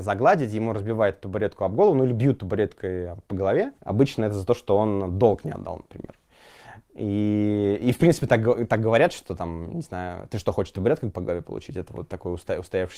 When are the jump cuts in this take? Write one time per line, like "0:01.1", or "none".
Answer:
0:03.8